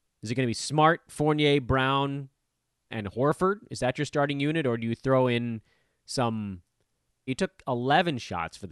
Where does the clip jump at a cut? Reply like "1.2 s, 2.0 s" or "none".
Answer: 2.9 s, 7.3 s

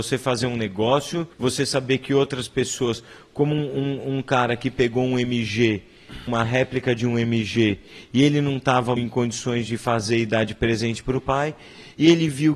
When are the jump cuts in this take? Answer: 1.3 s, 6.3 s, 9.0 s

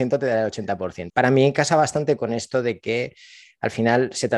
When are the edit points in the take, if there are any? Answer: 1.1 s

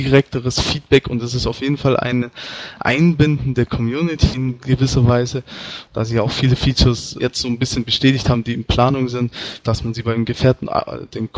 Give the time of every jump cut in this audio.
5.9 s, 7.2 s, 9.6 s

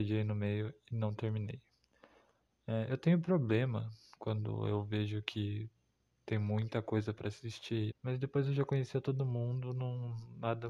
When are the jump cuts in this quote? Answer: 7.9 s

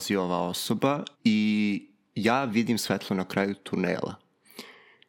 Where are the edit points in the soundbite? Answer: 1.1 s

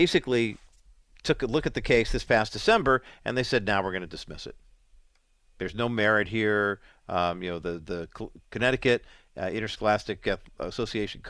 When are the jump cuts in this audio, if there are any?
none

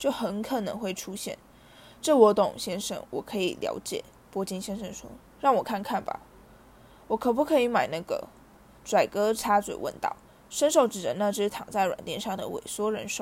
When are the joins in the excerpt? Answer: none

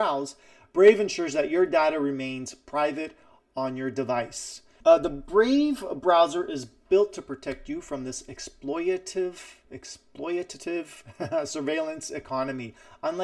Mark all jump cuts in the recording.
4.8 s, 9.6 s

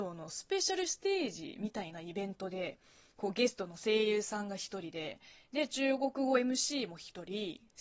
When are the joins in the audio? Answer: none

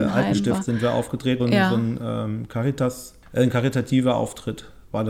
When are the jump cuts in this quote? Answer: 1.4 s, 3.2 s

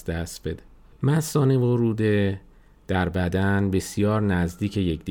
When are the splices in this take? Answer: 0.9 s

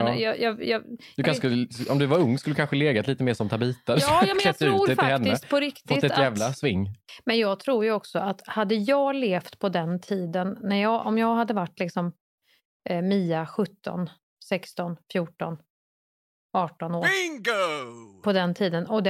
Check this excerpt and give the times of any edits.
none

